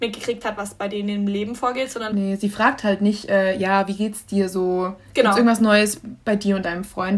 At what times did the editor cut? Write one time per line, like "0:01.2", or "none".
none